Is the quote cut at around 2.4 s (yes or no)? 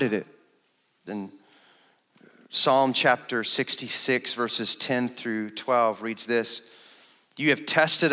no